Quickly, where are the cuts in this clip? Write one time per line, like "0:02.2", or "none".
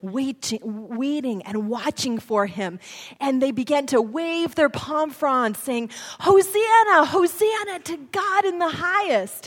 none